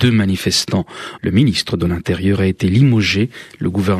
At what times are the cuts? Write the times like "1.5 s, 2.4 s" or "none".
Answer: 1.2 s